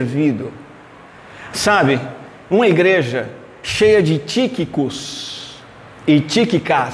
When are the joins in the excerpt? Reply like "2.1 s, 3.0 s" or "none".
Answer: 1.5 s

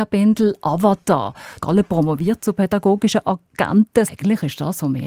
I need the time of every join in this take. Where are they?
1.6 s, 4.1 s

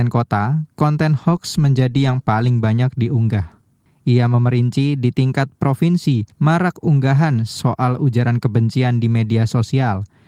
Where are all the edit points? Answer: 3.9 s, 6.3 s

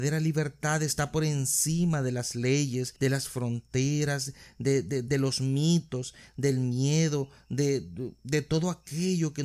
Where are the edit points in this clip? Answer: none

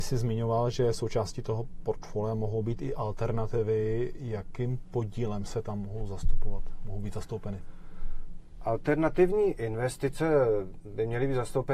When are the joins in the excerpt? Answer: none

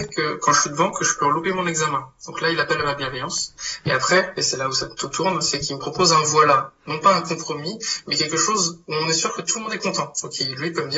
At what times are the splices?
none

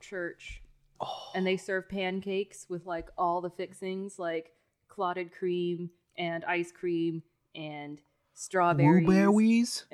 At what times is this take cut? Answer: 1.0 s

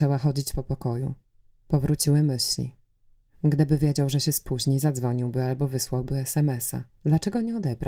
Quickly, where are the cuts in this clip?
6.9 s

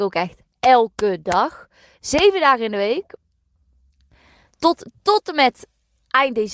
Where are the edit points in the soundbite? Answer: none

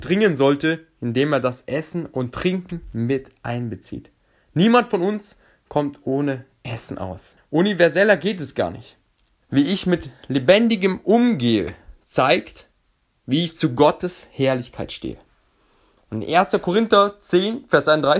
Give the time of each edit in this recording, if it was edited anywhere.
7.4 s, 9.4 s

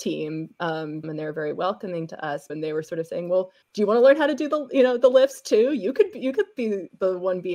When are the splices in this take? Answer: 1.0 s, 2.5 s, 3.6 s

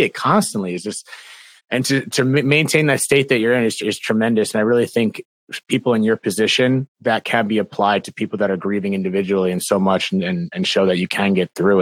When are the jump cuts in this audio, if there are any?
6.9 s

